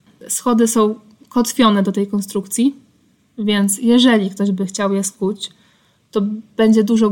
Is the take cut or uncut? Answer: uncut